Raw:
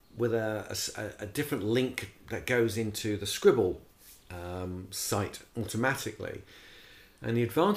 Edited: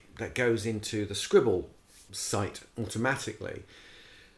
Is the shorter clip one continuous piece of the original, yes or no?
no